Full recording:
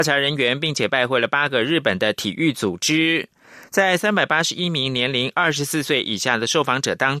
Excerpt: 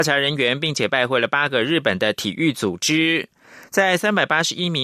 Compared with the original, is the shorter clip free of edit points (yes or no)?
yes